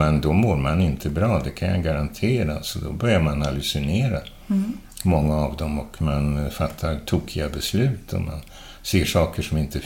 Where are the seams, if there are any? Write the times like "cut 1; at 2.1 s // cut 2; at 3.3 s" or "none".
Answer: none